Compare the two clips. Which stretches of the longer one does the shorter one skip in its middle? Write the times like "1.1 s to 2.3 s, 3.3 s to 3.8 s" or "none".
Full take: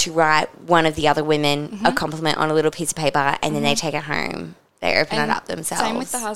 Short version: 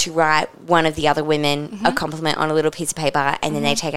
none